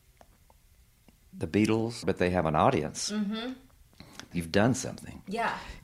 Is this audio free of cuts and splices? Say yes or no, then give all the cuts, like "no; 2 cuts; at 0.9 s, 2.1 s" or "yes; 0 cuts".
no; 2 cuts; at 2.0 s, 4.3 s